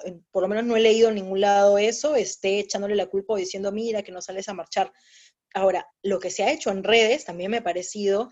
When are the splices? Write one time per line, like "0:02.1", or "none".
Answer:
0:05.4